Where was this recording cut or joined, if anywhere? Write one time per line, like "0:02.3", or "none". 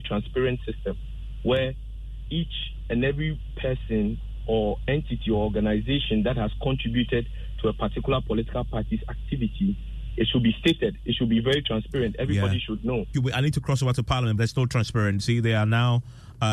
0:13.1
0:14.4